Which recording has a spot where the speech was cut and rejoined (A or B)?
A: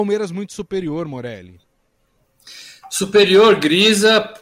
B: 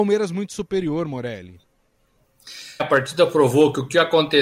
B